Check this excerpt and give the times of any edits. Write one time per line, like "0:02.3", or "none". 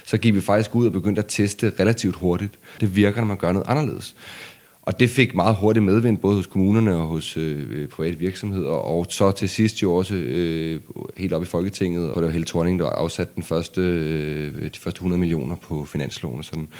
0:02.8
0:12.1